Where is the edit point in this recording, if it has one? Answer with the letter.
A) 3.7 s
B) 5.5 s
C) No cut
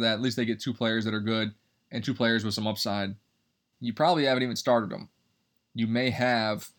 A